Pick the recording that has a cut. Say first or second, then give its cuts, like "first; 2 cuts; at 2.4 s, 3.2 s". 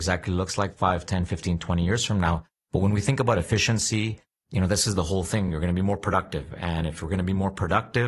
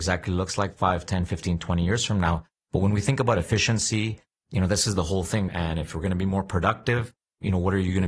second; 1 cut; at 5.5 s